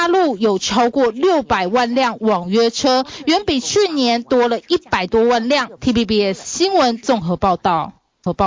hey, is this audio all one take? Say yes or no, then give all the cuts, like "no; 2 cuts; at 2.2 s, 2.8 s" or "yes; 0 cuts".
no; 1 cut; at 5.8 s